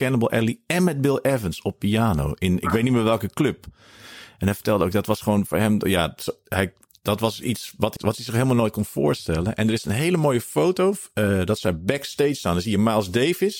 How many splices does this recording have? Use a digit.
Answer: 1